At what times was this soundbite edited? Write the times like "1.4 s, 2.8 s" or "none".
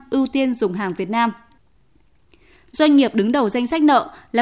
2.7 s

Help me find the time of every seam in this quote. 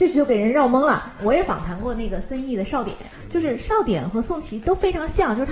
none

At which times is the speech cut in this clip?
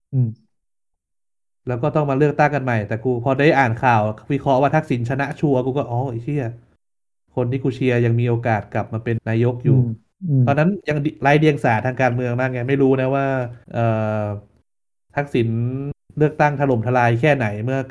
9.2 s, 13.6 s

